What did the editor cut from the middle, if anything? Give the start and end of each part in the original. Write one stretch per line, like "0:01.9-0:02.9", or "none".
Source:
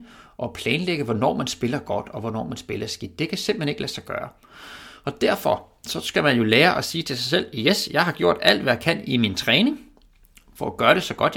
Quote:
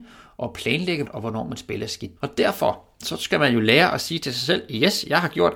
0:01.0-0:02.0
0:03.2-0:05.0